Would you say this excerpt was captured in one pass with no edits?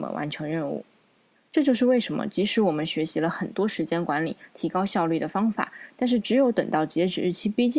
no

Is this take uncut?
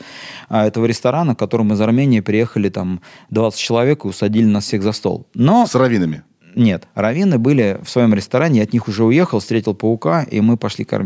yes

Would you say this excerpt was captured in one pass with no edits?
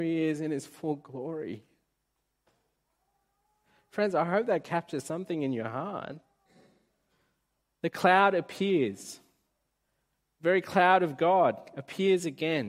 yes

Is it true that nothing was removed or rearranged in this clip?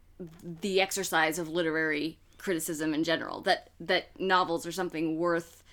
yes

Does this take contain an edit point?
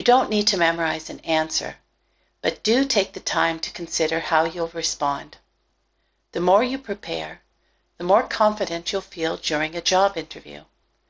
no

